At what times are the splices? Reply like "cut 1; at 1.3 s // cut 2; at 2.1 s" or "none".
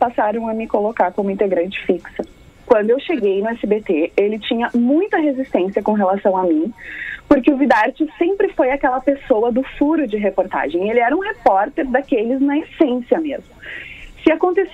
cut 1; at 2.5 s